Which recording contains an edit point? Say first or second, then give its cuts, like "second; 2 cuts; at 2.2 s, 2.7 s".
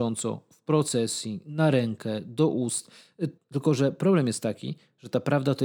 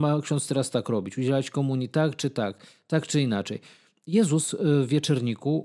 first; 1 cut; at 3.4 s